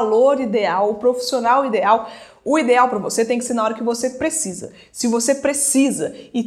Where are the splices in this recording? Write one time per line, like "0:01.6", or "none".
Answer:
none